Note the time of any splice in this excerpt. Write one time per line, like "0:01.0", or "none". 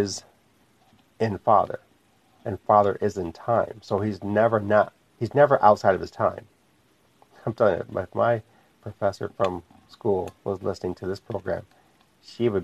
0:05.1

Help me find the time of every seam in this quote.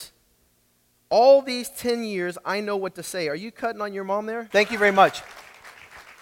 0:04.5

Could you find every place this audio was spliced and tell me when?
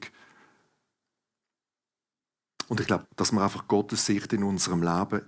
0:03.0

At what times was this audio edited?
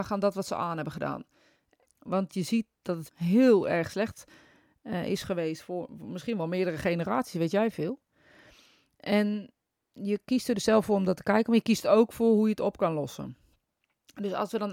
0:01.8
0:03.1

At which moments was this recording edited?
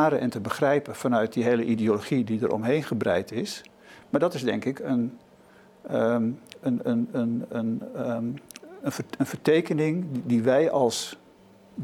none

